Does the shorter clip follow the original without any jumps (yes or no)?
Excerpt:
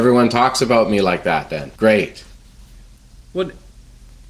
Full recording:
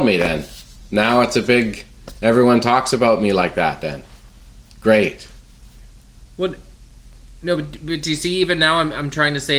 no